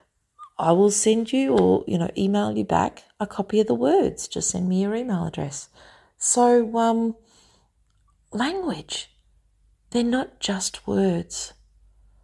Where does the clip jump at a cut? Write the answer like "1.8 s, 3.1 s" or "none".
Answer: none